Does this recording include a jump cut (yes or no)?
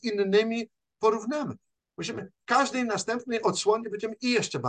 yes